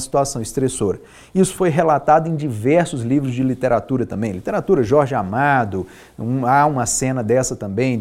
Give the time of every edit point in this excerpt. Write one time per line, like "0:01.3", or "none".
none